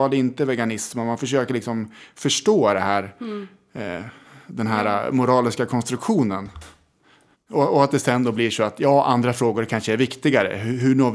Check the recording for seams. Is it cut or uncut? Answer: cut